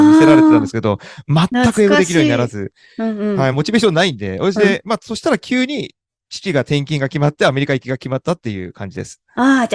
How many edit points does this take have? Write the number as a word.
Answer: one